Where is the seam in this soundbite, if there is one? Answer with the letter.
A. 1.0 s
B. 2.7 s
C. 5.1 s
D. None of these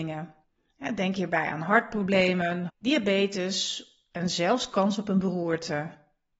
B